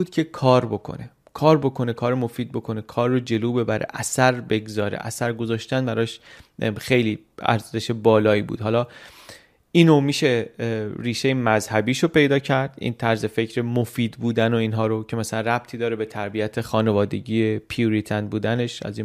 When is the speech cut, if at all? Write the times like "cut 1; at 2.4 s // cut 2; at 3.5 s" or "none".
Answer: none